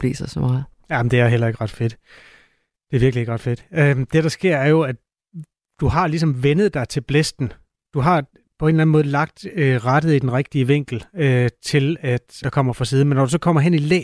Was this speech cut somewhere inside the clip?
yes; 1 cut; at 12.4 s

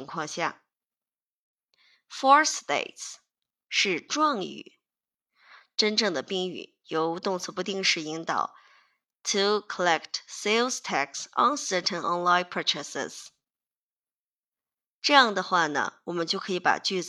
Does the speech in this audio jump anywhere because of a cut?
no; 0 cuts

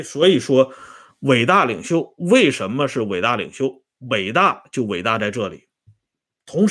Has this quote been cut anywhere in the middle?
no; 0 cuts

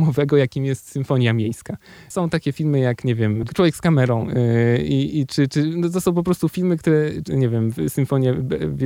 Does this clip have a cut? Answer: yes; 2 cuts; at 3.5 s, 7.2 s

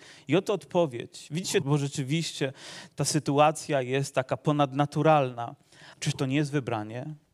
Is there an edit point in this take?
yes; 3 cuts; at 1.6 s, 2.9 s, 5.9 s

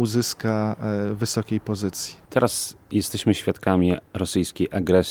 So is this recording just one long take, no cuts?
yes; 0 cuts

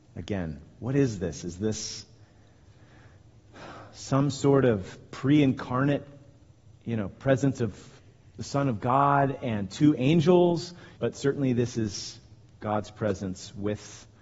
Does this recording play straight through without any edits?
no; 1 cut; at 11.0 s

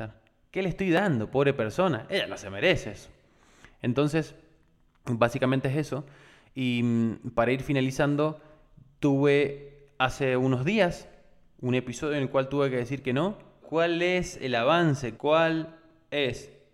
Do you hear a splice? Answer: yes; 2 cuts; at 13.6 s, 15.2 s

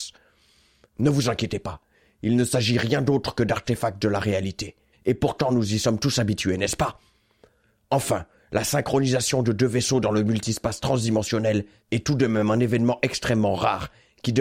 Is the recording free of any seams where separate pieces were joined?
no; 1 cut; at 4.9 s

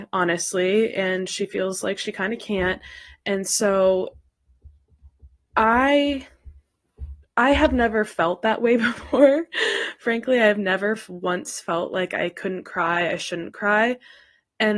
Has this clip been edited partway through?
no; 0 cuts

